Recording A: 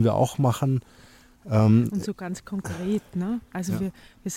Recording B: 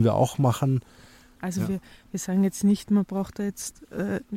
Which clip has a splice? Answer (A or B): B